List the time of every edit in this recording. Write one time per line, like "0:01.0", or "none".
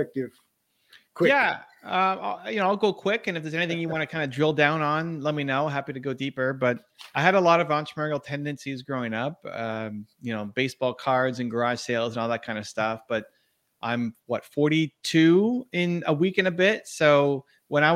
none

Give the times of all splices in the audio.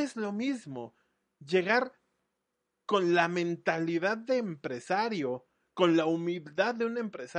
none

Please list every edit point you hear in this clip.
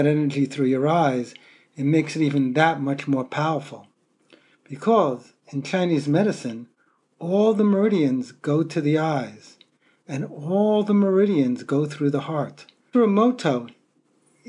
0:12.9

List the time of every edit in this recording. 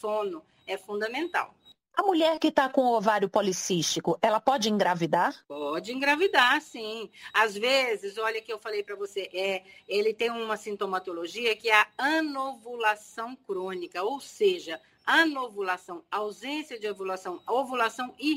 0:05.4

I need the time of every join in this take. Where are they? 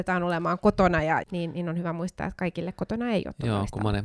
0:01.2

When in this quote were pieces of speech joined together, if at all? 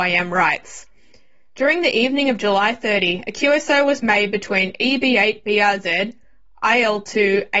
none

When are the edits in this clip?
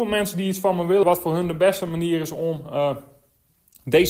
0:01.0

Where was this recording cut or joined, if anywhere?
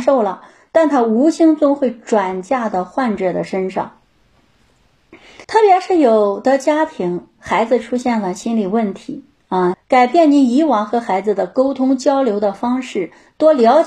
0:05.4
0:09.7

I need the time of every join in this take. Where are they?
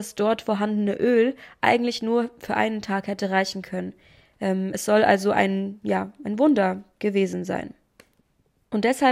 none

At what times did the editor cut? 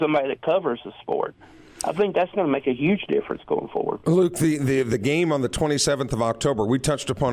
none

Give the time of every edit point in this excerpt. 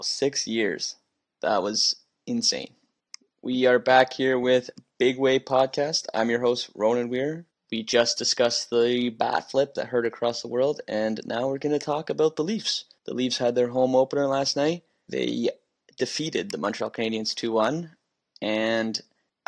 none

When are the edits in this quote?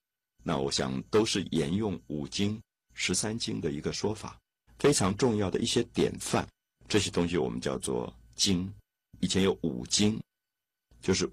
0:04.7

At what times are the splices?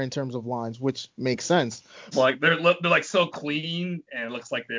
0:02.1

